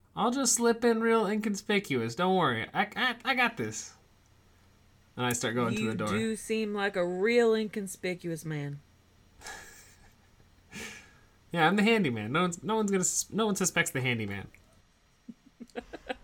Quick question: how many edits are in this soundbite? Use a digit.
0